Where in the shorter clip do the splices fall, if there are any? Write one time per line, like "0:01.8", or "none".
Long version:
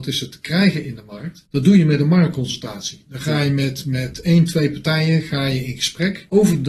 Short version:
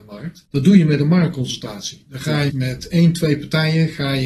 0:02.5